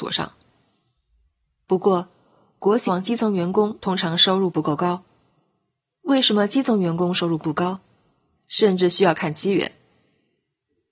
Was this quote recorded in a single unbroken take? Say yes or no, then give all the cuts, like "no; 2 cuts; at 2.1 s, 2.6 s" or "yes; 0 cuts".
no; 2 cuts; at 2.9 s, 8.4 s